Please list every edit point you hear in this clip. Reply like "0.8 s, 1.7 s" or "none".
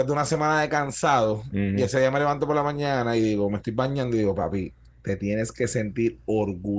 none